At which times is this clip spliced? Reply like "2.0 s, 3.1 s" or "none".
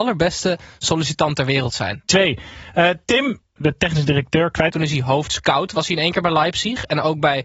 2.0 s, 3.6 s, 4.7 s